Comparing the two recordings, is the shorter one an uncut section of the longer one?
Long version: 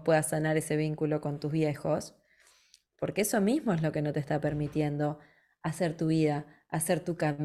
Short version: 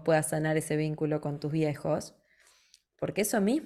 yes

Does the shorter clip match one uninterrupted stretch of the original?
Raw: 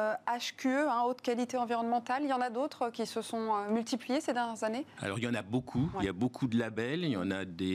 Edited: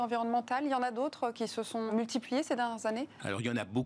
no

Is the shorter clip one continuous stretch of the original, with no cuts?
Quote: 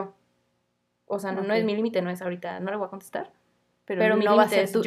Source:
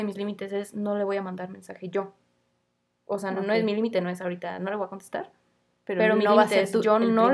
yes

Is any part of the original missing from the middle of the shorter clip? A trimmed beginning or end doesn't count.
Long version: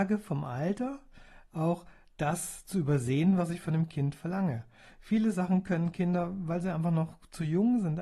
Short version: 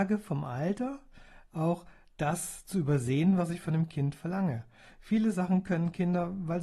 no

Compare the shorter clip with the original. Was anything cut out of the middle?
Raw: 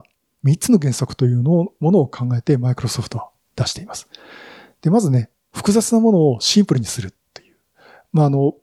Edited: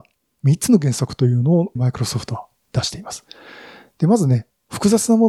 yes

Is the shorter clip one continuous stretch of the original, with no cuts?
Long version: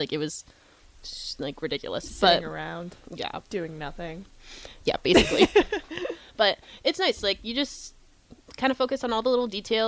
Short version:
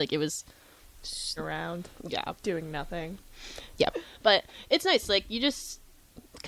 no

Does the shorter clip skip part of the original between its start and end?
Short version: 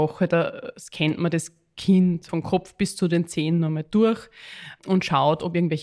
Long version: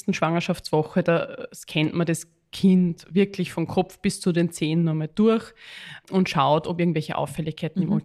yes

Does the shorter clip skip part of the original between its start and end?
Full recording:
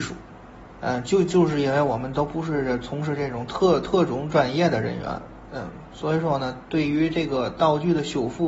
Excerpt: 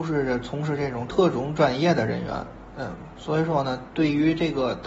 yes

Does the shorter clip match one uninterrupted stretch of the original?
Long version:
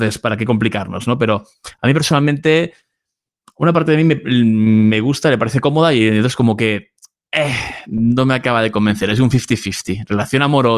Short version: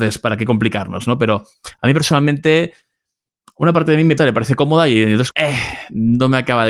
no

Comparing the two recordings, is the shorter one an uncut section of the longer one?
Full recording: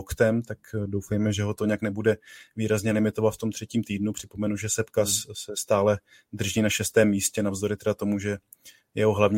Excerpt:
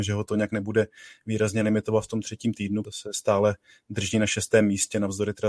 no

